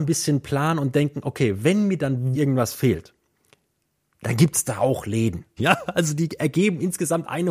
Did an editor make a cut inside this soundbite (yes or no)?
yes